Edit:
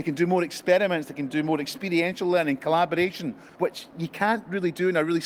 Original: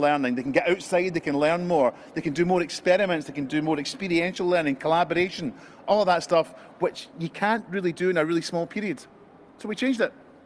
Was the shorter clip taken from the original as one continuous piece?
no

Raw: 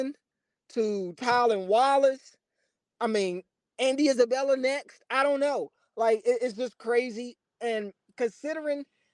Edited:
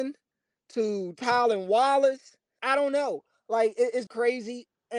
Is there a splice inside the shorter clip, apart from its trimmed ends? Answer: yes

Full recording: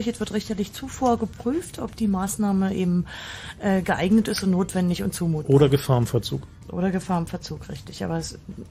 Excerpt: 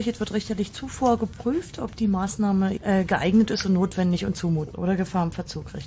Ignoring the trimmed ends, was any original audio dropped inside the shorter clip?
yes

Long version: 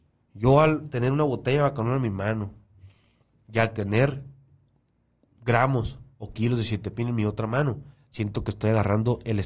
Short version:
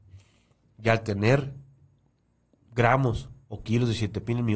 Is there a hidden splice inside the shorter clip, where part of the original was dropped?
no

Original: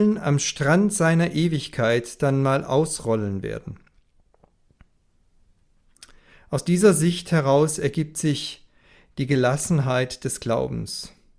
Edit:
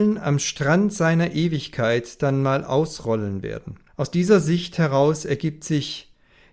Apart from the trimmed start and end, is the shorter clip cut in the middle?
yes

